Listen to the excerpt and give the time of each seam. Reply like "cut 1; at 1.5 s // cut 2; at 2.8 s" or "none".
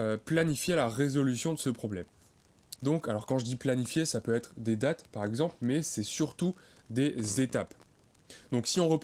cut 1; at 2.8 s